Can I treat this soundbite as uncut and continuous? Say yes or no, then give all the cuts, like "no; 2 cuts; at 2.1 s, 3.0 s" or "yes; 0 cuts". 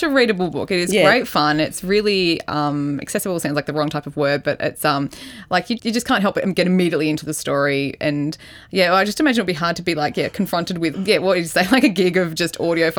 no; 2 cuts; at 5.8 s, 10.9 s